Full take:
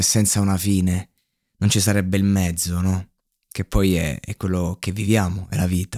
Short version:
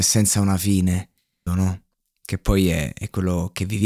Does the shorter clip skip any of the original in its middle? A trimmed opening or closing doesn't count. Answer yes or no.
yes